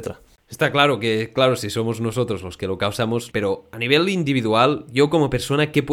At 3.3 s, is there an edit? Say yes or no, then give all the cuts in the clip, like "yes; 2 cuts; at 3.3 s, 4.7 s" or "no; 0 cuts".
yes; 1 cut; at 3.3 s